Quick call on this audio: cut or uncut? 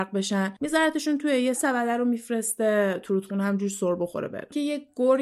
cut